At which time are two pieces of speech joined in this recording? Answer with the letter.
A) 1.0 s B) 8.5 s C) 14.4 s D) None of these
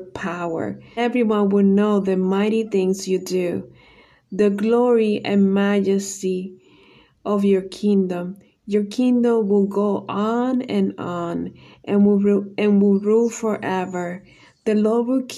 A